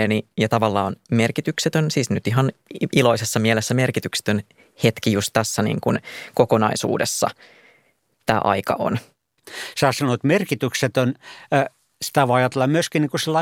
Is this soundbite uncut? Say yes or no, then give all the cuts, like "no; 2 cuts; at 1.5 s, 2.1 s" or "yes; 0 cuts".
yes; 0 cuts